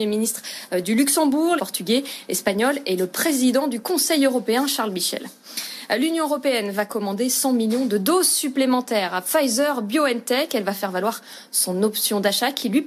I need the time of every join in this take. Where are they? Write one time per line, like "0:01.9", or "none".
0:01.6